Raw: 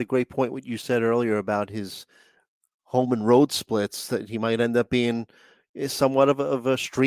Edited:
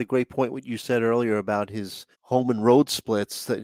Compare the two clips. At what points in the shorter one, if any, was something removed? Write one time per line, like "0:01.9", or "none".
0:02.1